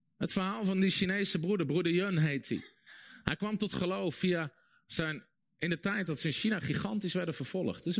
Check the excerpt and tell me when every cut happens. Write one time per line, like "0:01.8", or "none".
none